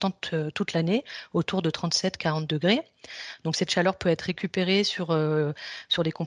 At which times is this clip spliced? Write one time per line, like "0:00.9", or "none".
none